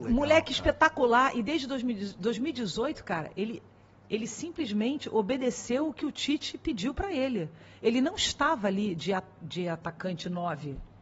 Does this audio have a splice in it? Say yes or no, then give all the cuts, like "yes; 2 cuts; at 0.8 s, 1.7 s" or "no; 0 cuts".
no; 0 cuts